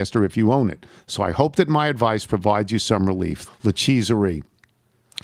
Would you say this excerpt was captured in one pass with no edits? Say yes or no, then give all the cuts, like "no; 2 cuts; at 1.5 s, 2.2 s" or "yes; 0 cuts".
no; 2 cuts; at 1.0 s, 3.4 s